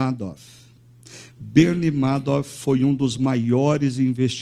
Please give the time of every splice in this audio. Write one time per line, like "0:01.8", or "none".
none